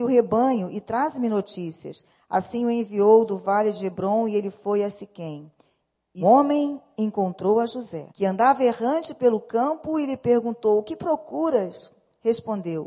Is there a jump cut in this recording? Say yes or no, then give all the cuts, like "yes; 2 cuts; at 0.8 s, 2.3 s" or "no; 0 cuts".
yes; 2 cuts; at 6.2 s, 8.1 s